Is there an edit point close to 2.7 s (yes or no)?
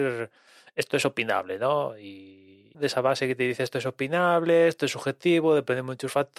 yes